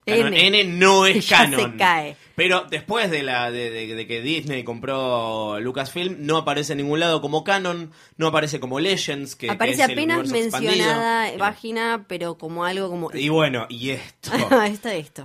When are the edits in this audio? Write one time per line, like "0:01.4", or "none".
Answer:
0:11.4
0:13.1